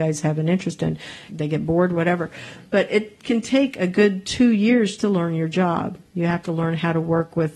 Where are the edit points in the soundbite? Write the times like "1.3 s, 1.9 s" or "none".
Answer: 1.3 s, 5.0 s